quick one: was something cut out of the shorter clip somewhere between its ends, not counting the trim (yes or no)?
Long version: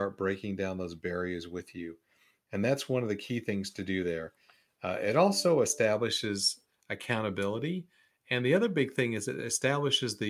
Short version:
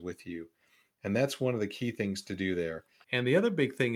yes